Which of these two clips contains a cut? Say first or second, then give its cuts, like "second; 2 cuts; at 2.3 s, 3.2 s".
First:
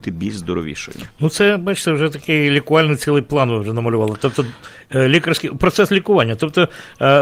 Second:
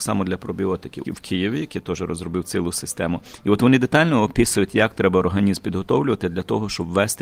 second; 1 cut; at 1.0 s